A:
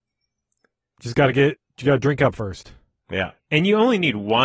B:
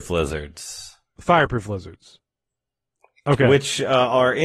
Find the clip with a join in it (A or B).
A